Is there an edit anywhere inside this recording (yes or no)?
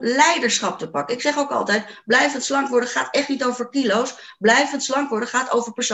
no